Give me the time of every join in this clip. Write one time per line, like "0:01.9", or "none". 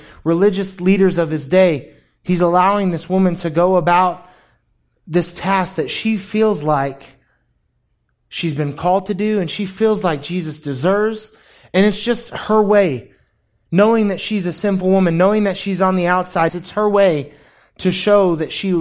0:16.5